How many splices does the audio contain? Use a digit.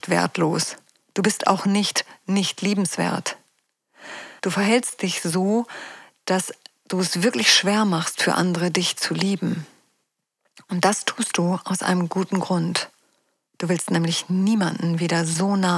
1